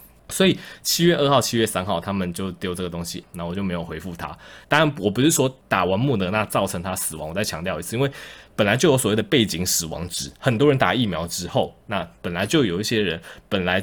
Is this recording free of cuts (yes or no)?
no